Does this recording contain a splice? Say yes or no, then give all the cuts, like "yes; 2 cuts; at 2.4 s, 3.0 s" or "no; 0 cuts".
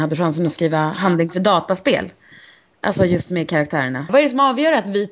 yes; 1 cut; at 4.1 s